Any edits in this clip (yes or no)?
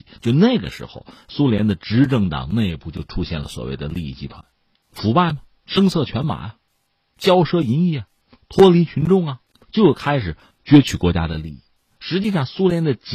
no